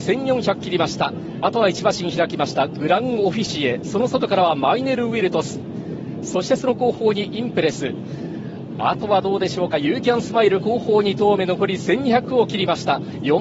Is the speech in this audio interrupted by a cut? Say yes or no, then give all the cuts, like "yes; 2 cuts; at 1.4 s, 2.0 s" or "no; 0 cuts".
no; 0 cuts